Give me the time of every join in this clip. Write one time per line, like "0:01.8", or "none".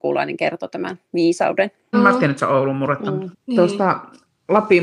0:01.9
0:03.3